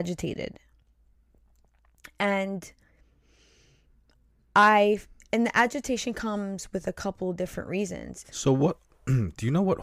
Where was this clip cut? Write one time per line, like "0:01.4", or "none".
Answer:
0:08.2